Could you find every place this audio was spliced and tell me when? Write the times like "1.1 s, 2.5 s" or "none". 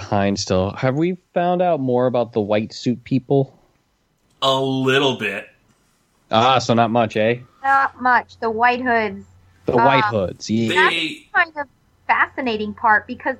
none